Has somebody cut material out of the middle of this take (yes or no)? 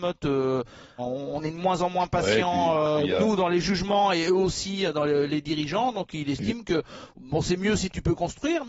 yes